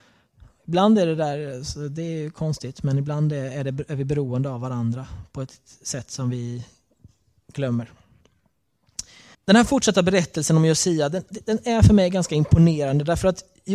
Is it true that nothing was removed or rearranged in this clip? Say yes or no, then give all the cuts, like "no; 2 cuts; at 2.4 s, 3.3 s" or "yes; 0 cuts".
no; 1 cut; at 9.3 s